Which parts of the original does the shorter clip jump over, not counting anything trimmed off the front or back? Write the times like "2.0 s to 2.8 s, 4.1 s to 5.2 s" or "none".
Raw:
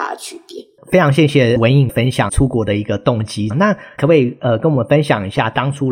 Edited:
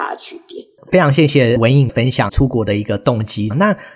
none